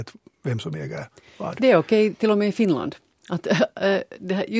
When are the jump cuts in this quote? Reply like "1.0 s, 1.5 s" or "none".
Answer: none